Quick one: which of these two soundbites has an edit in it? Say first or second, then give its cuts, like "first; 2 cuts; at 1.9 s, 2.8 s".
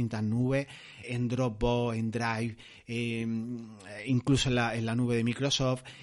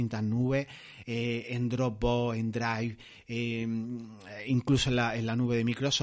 first; 1 cut; at 1.0 s